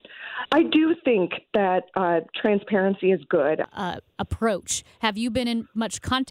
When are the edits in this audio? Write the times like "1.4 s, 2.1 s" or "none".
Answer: 3.6 s